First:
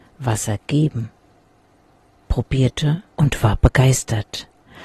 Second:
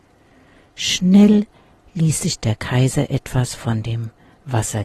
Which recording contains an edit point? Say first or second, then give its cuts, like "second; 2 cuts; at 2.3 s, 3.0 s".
first; 1 cut; at 3.1 s